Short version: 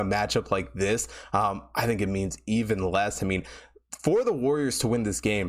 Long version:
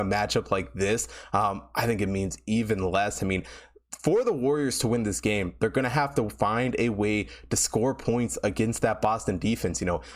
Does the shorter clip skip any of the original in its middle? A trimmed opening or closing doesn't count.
no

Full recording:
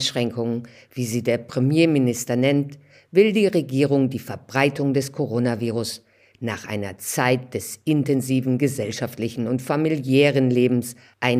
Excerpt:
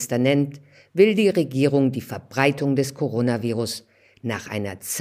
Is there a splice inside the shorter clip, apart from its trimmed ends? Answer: no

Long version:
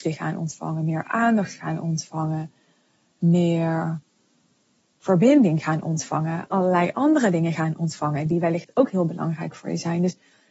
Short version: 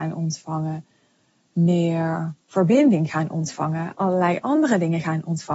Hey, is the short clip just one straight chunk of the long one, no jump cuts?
no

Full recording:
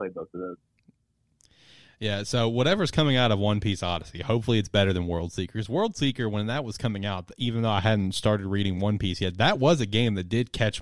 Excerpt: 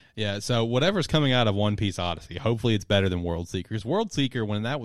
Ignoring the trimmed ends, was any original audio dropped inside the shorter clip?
no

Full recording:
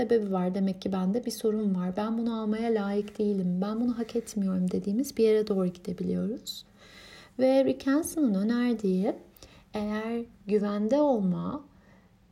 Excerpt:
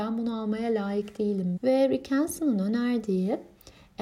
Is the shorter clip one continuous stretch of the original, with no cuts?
no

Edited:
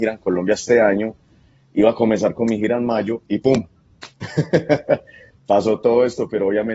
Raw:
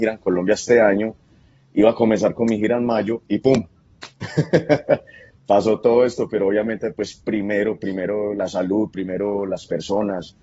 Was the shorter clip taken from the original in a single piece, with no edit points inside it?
yes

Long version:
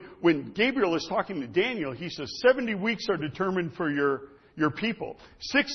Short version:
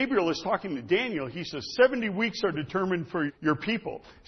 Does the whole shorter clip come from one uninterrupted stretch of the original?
no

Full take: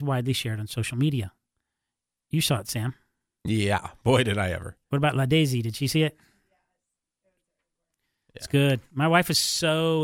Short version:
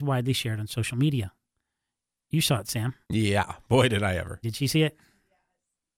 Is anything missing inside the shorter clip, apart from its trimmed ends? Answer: yes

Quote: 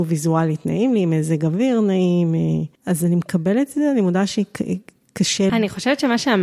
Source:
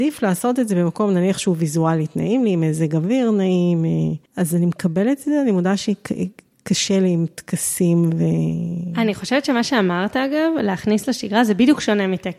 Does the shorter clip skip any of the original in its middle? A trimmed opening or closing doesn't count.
yes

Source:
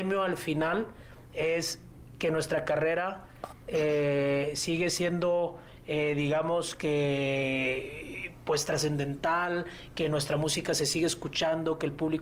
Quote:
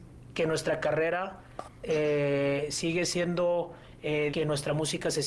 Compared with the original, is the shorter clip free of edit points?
no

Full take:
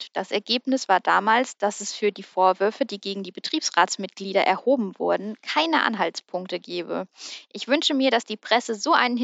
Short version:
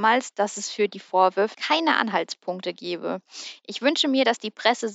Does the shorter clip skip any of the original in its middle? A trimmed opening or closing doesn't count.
yes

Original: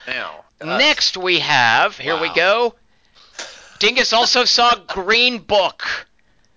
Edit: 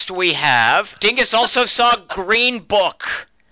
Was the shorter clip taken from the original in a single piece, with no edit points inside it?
no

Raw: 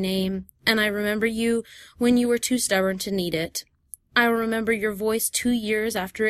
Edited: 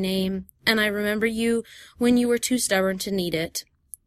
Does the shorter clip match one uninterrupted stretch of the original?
yes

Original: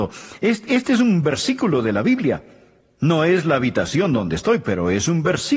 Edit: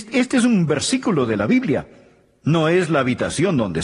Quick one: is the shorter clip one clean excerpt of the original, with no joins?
yes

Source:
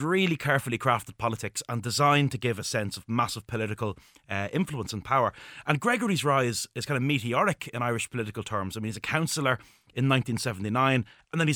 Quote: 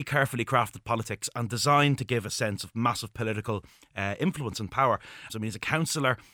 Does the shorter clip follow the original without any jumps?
no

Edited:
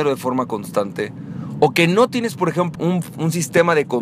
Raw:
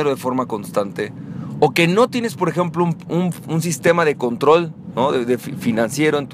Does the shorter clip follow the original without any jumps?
no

